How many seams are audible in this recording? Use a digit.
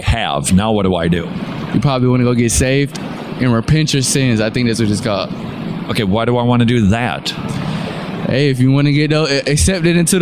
0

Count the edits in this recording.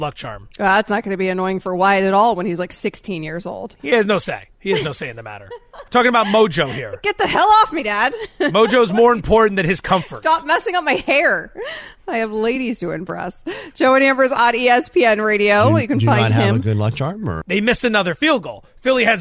1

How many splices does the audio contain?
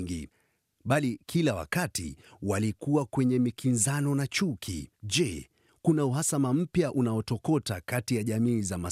1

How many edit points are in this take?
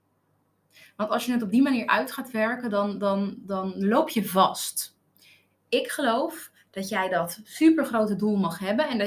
0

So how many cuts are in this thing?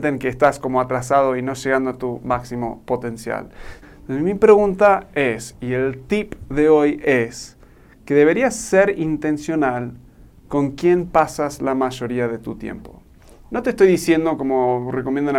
1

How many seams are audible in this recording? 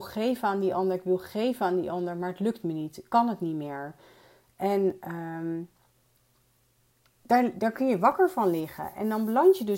0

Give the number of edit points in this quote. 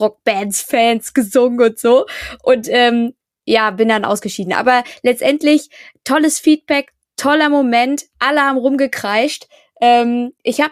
0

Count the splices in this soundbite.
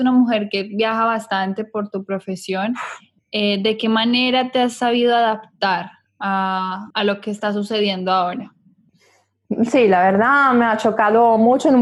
1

